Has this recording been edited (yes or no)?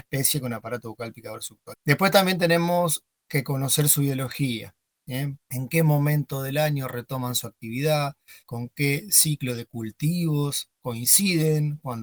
yes